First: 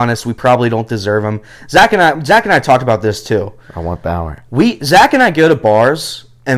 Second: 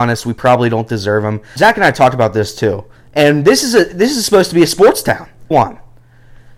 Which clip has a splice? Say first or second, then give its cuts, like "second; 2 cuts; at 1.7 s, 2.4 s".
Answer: second; 3 cuts; at 1.6 s, 3.0 s, 5.5 s